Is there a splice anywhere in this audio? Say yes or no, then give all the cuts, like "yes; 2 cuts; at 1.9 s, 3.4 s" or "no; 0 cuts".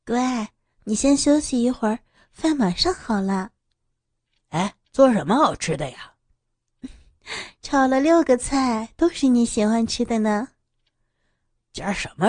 yes; 1 cut; at 4.8 s